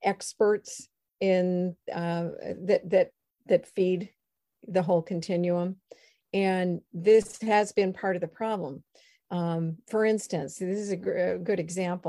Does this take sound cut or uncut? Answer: uncut